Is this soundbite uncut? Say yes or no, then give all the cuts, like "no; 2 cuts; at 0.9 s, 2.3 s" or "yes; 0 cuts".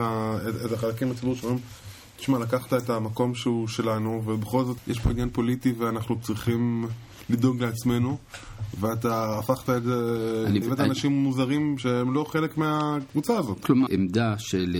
no; 3 cuts; at 10.6 s, 11.8 s, 13.9 s